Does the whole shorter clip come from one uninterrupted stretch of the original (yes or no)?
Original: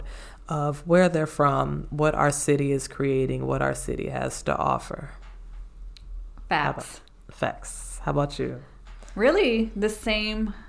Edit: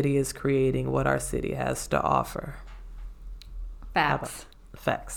yes